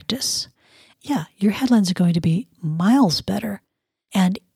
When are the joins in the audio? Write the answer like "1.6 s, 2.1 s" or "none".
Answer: 0.9 s